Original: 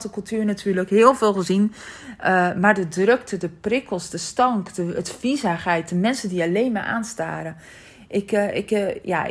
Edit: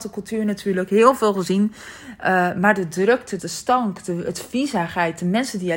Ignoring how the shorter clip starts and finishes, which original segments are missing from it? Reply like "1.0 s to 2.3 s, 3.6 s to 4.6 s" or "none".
3.4 s to 4.1 s